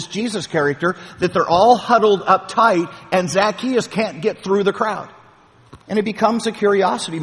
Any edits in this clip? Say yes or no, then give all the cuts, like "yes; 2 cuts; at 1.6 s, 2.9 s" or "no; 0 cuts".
yes; 1 cut; at 5.8 s